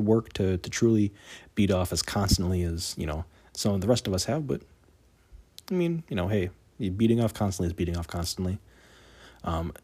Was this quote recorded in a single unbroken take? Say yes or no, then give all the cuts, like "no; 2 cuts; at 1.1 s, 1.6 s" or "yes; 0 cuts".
yes; 0 cuts